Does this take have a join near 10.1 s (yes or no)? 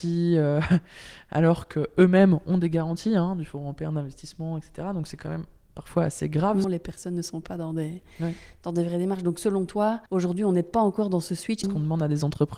yes